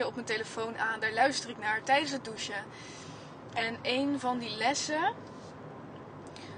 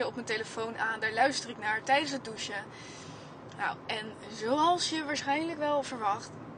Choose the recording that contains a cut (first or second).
first